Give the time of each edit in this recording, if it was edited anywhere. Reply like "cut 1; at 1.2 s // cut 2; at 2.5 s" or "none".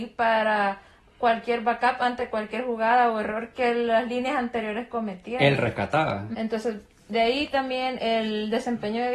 cut 1; at 6.3 s // cut 2; at 8.0 s